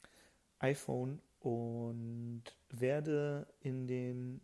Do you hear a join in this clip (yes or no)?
no